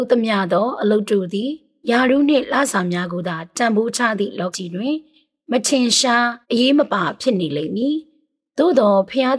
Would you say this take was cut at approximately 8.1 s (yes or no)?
no